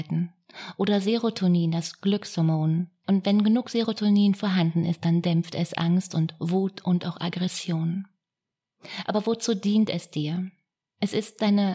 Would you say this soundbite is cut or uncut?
uncut